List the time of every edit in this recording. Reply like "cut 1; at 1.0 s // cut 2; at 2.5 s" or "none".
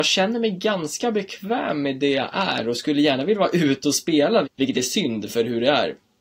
cut 1; at 4.4 s